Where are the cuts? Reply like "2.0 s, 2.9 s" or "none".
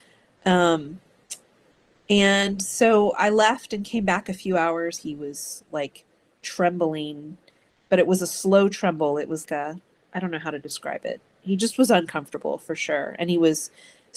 5.0 s, 9.5 s